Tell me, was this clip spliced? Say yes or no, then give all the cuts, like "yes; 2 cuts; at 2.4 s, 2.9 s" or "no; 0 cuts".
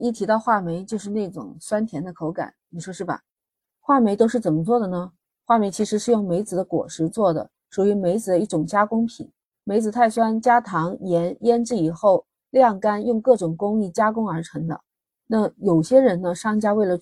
yes; 1 cut; at 2.7 s